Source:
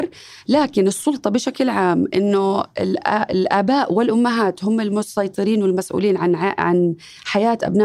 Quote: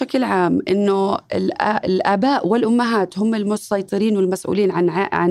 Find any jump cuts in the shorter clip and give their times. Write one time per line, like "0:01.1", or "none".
none